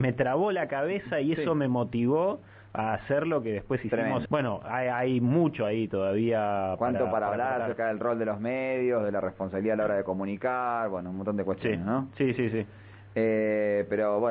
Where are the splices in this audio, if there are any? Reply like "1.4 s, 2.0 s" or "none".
4.3 s